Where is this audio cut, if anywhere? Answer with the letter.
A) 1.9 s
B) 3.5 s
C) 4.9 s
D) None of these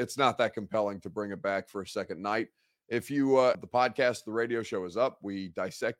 B